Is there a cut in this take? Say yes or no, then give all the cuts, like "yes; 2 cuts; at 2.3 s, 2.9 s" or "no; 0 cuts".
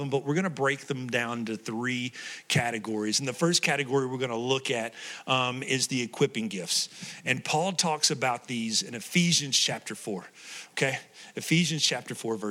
no; 0 cuts